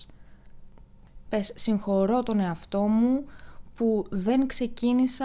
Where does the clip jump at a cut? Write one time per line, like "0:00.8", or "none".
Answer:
0:01.2